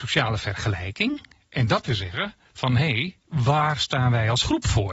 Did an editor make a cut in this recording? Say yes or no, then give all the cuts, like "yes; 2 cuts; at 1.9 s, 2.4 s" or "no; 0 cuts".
no; 0 cuts